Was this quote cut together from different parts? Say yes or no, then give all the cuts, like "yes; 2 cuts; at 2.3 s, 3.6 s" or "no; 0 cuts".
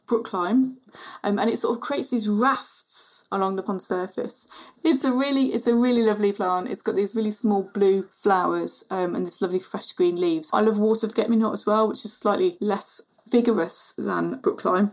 yes; 1 cut; at 10.5 s